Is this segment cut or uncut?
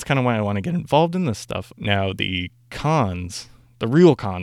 cut